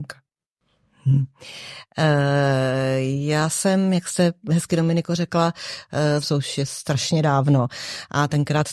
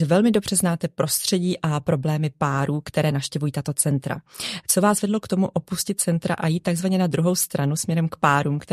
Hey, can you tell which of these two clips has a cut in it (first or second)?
first